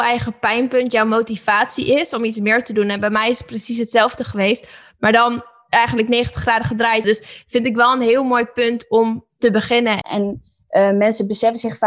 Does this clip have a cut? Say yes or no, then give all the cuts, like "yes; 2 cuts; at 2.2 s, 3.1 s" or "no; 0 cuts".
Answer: yes; 2 cuts; at 7.0 s, 10.0 s